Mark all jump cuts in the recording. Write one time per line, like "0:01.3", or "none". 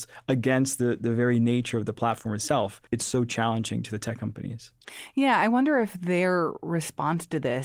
0:02.9